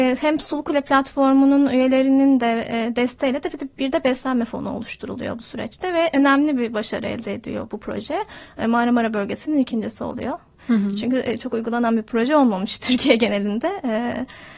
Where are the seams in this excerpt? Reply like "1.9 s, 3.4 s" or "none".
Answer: none